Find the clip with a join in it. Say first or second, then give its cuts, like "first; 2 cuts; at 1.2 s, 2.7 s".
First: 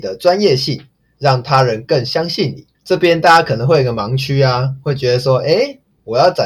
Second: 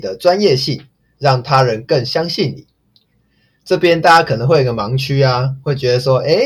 first; 1 cut; at 2.7 s